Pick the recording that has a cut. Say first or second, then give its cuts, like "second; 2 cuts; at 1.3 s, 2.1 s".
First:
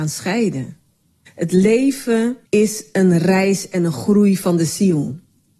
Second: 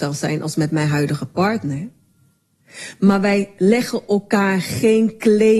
first; 2 cuts; at 1.3 s, 2.5 s